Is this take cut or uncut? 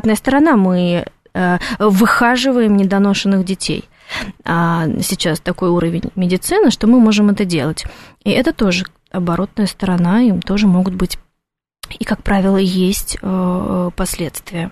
uncut